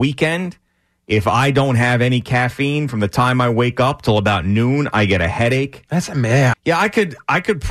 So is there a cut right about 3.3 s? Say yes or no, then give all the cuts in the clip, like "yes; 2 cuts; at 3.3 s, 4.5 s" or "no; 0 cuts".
no; 1 cut; at 6.5 s